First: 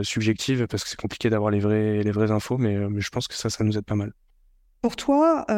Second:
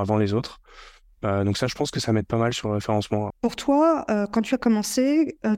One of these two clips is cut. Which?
second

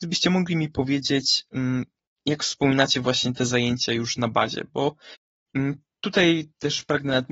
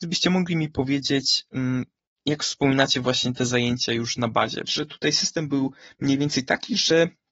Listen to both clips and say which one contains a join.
second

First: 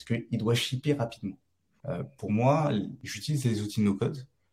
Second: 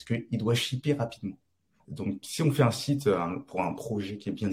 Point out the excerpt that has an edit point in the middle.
first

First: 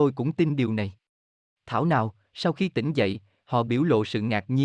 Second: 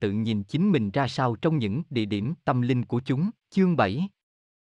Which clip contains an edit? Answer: second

